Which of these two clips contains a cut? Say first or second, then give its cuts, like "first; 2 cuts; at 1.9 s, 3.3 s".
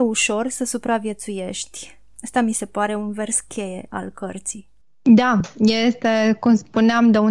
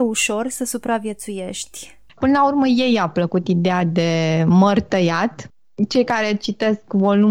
second; 1 cut; at 2.1 s